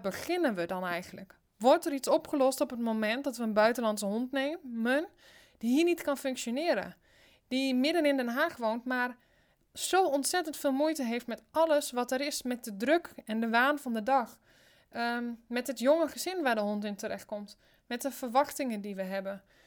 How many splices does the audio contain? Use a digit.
0